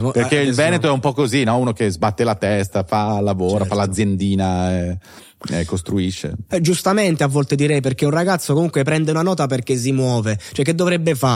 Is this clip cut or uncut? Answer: cut